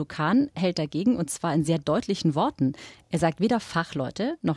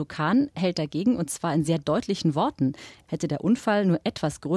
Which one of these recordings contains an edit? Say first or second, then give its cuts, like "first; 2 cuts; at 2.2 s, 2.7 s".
second; 1 cut; at 3.1 s